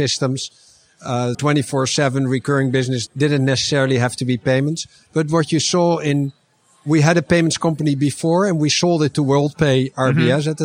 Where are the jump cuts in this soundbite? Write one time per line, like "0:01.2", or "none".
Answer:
0:01.3
0:03.1